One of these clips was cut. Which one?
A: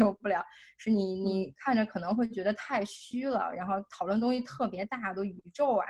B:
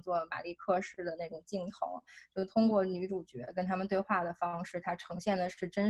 B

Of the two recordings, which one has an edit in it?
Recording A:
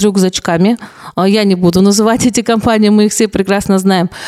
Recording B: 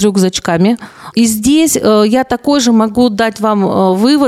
B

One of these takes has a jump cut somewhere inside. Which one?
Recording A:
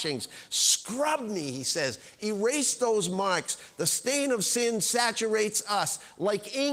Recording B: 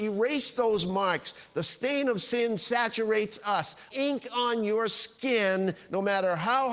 B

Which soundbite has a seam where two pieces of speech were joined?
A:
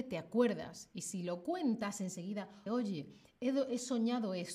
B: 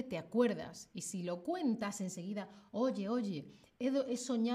A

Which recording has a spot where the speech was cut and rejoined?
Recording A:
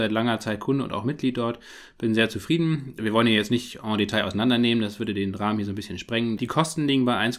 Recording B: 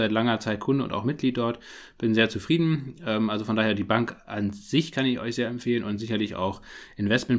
A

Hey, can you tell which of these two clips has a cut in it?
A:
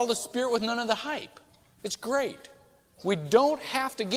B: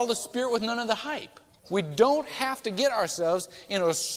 B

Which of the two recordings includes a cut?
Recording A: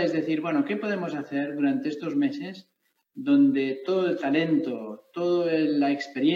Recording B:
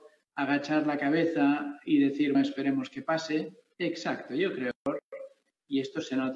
B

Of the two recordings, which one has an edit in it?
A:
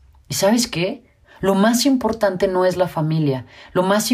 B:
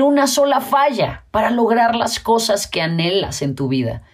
A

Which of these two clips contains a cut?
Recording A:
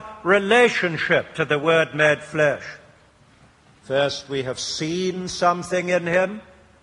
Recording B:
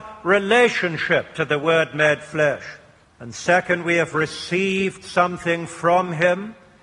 B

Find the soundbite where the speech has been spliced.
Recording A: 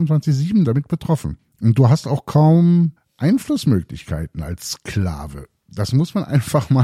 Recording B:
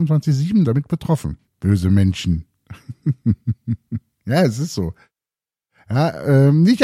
B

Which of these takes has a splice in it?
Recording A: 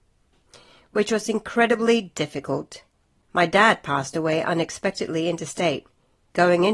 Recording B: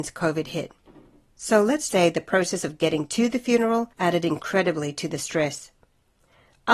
B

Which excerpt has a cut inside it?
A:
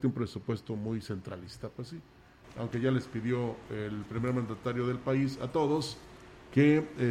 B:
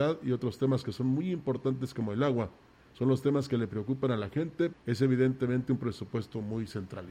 B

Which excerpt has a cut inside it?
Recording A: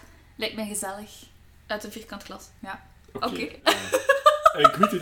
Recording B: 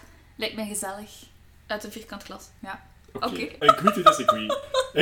B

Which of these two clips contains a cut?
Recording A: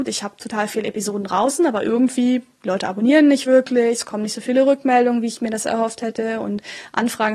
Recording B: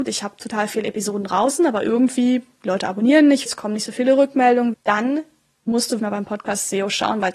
B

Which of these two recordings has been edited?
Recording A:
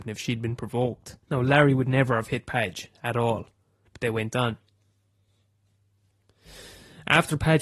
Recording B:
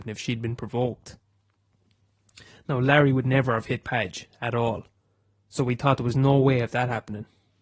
A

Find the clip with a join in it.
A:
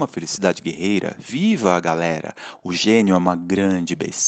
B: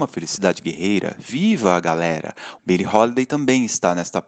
B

